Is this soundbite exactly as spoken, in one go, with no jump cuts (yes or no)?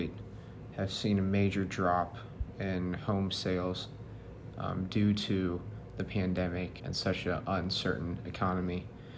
no